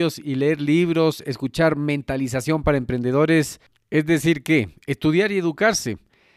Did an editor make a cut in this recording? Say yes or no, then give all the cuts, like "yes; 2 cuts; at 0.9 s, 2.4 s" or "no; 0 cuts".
no; 0 cuts